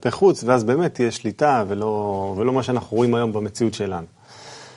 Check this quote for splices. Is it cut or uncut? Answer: uncut